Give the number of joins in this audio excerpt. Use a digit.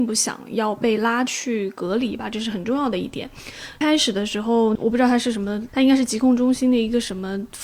2